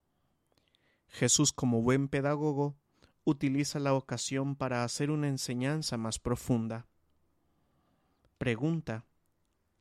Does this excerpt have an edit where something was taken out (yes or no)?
no